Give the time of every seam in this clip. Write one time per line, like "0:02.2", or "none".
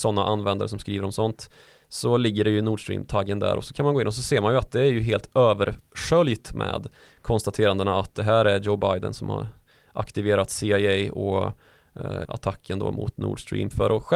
0:12.3